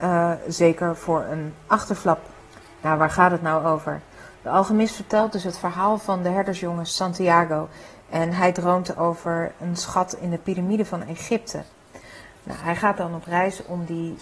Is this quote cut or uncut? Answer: uncut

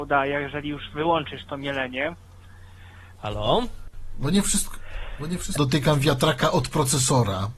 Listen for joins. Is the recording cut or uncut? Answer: cut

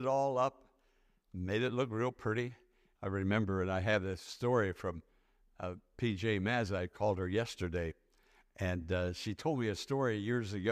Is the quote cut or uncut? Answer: cut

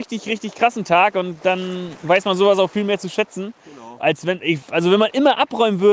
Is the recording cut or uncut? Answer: uncut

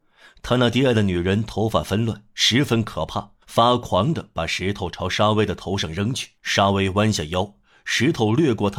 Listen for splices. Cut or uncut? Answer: cut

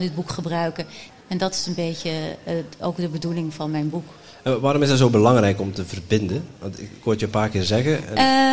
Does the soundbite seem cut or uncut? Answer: cut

